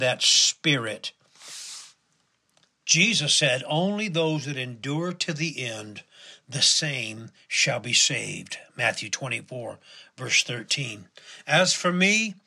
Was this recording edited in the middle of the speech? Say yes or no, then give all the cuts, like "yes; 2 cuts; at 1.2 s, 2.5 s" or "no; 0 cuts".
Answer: no; 0 cuts